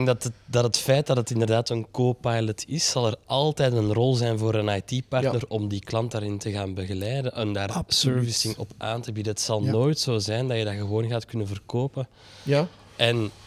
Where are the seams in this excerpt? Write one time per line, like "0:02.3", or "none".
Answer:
none